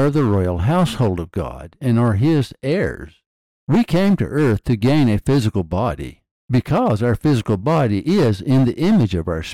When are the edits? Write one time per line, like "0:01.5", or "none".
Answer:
0:06.4